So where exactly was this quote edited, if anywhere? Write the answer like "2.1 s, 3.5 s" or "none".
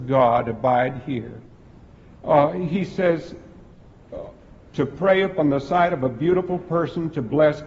2.2 s